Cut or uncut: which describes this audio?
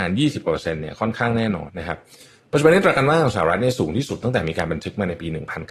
cut